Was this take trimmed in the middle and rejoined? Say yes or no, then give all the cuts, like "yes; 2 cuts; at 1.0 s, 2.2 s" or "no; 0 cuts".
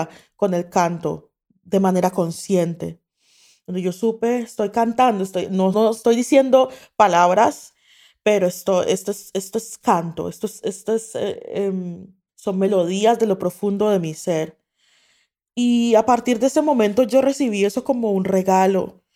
yes; 1 cut; at 5.7 s